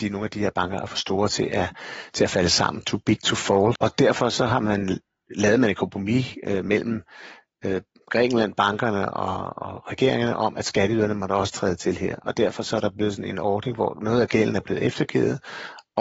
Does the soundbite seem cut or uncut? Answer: uncut